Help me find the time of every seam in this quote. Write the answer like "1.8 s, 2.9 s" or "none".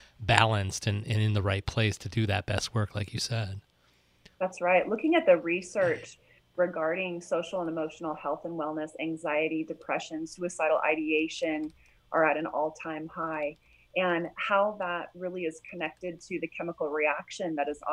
none